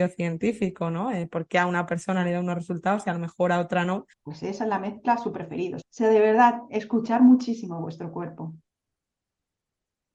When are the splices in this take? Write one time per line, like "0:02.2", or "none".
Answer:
0:04.1
0:05.8